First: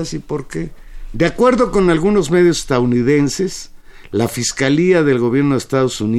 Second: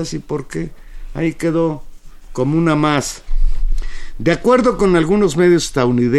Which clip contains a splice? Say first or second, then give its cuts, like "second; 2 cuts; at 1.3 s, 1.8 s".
first; 1 cut; at 1.1 s